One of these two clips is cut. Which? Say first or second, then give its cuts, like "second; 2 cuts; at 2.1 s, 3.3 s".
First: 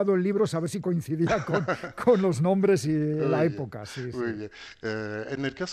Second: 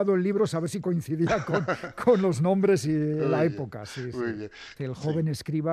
second; 1 cut; at 4.8 s